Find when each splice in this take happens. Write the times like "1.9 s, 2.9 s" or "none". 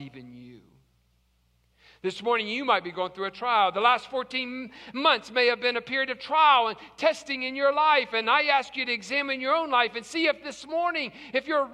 none